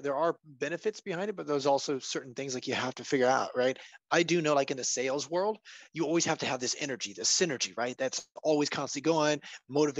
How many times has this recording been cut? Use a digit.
0